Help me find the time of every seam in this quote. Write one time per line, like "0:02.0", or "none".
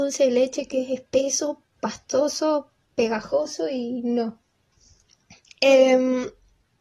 0:04.7